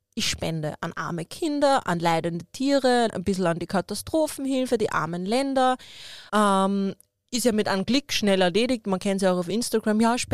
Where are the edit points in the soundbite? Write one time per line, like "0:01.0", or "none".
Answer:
0:03.1
0:06.3